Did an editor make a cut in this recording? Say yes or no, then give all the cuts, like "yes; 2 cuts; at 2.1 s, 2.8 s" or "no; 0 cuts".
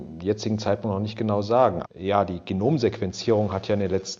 yes; 1 cut; at 1.8 s